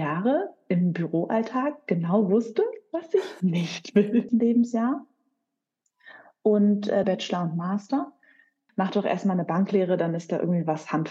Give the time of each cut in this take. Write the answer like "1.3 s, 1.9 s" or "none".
4.3 s, 7.0 s, 8.7 s